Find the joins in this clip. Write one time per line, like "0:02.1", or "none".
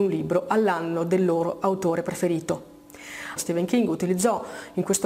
0:03.4

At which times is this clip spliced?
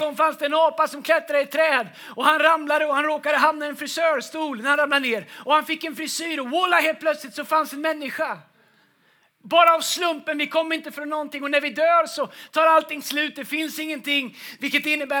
none

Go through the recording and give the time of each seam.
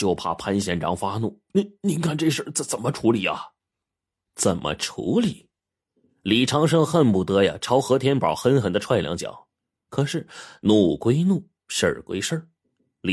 none

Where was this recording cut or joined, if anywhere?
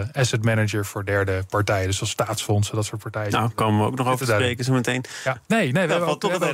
0:05.4

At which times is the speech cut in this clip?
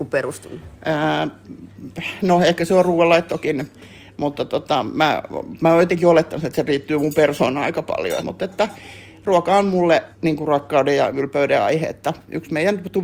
0:08.2
0:10.1

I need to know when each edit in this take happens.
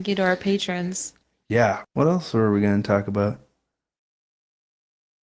0:01.8

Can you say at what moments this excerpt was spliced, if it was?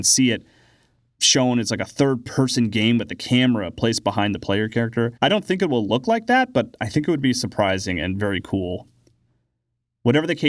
0:05.2

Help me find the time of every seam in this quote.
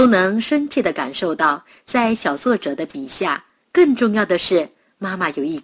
0:03.6

